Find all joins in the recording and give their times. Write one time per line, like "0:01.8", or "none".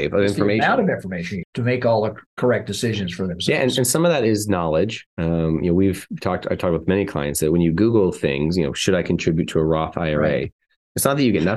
0:01.4